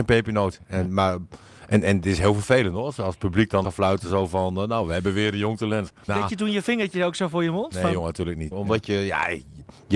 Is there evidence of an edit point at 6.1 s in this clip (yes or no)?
yes